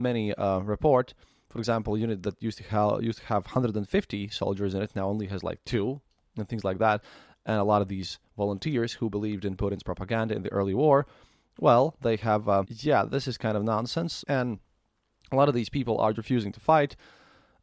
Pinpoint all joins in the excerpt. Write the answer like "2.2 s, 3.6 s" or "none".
12.6 s, 14.2 s, 16.1 s